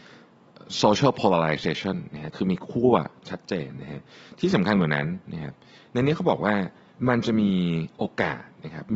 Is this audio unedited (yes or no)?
yes